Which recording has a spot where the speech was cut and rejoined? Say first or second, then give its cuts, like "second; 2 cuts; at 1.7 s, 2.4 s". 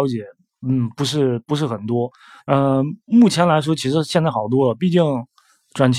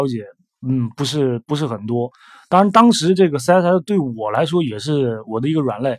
first; 1 cut; at 2.4 s